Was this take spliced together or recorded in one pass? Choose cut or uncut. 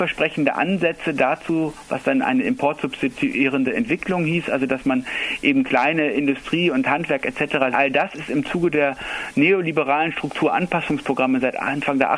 cut